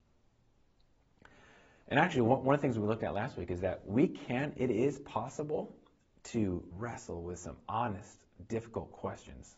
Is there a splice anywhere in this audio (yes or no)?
yes